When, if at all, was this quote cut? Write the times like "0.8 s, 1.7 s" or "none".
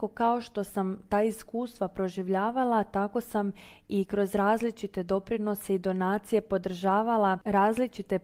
none